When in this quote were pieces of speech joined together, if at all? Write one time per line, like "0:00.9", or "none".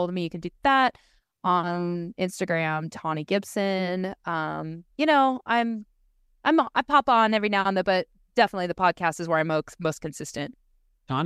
none